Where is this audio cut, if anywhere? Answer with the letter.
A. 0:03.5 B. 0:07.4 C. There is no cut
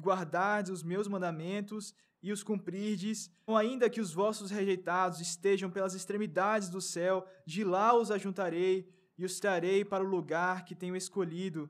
A